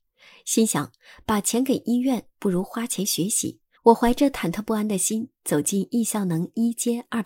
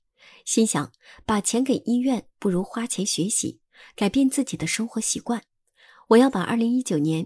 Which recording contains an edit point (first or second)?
first